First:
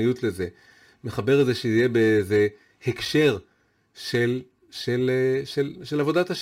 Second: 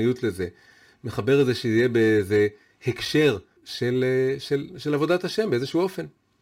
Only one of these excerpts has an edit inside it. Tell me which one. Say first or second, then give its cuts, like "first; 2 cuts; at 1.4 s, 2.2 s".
second; 1 cut; at 3.6 s